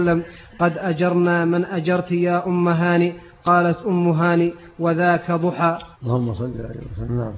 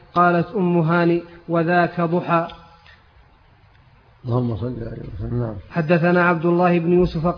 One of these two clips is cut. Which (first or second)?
first